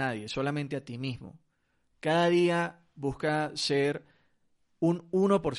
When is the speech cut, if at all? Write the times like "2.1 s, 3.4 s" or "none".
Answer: none